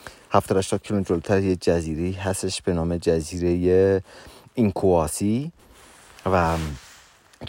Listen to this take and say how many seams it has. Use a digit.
0